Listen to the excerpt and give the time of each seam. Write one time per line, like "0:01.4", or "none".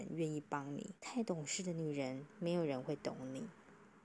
0:01.0